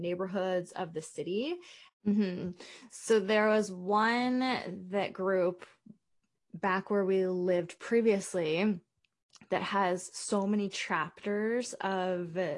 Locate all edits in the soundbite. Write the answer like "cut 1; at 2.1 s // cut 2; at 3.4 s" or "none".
cut 1; at 1.9 s